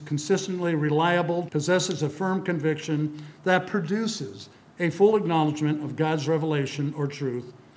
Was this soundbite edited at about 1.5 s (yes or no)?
yes